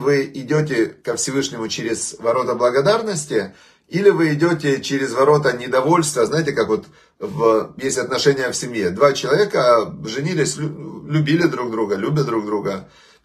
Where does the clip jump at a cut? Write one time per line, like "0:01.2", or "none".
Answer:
none